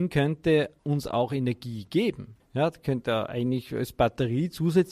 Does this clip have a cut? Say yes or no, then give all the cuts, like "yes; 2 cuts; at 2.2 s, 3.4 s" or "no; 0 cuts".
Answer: no; 0 cuts